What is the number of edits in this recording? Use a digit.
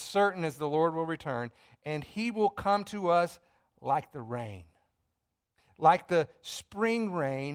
0